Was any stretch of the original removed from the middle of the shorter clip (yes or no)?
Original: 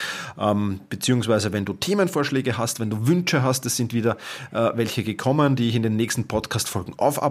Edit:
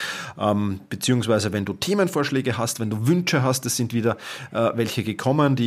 no